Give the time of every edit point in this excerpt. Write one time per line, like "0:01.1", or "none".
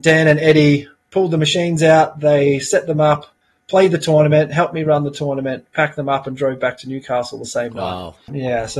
none